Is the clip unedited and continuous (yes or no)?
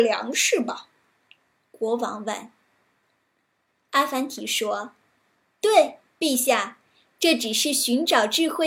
yes